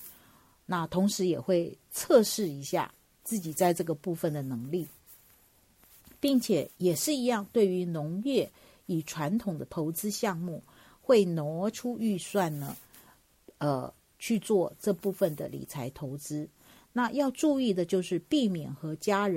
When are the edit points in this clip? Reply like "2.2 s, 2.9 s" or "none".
none